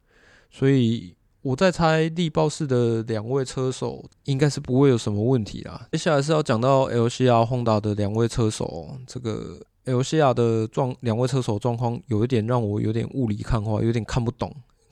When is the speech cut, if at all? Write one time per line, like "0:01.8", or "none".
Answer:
0:04.1
0:05.9

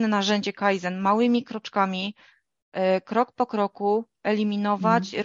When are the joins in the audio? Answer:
none

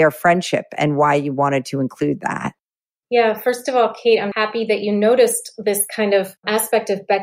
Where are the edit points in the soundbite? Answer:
0:04.3

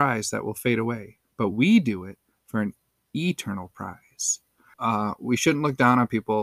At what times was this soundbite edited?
0:04.7

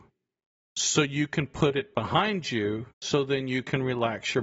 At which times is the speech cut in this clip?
0:02.9

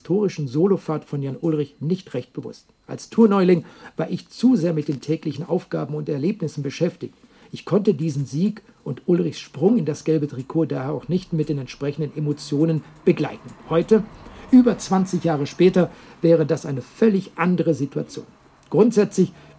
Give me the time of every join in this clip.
none

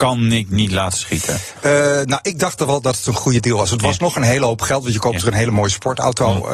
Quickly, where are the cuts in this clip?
none

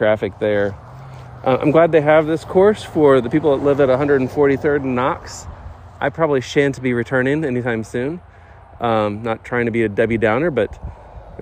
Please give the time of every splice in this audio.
none

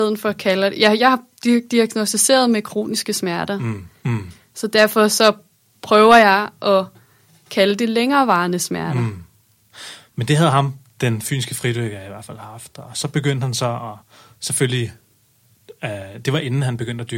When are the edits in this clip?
0:04.0

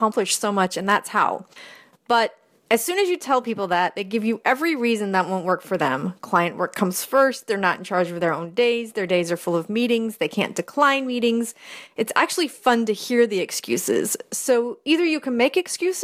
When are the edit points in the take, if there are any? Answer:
none

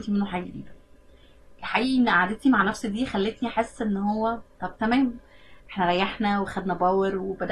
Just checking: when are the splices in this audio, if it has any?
0:04.5

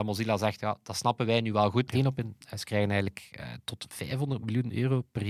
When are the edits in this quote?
0:01.9

